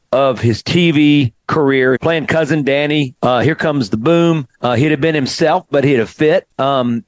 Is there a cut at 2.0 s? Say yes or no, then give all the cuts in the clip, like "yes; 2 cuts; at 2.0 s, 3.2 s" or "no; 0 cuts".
yes; 3 cuts; at 2.0 s, 3.1 s, 4.5 s